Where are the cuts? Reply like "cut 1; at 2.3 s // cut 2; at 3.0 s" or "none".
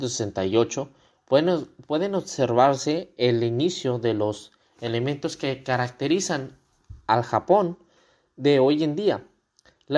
none